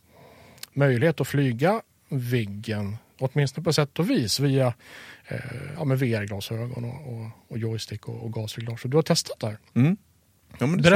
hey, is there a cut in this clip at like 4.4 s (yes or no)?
no